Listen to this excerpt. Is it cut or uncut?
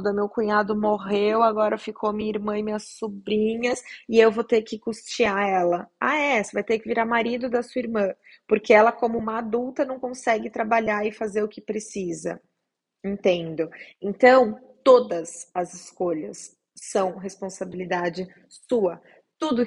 uncut